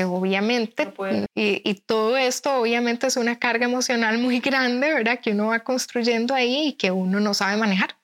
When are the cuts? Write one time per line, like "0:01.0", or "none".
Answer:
0:01.3